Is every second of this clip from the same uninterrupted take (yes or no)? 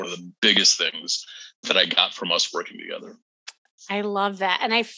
yes